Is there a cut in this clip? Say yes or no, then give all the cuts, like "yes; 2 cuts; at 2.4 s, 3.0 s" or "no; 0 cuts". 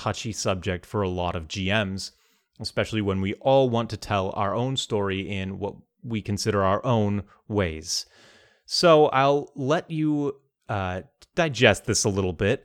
no; 0 cuts